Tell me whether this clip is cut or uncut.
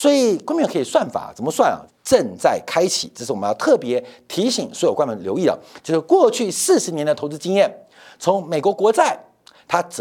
cut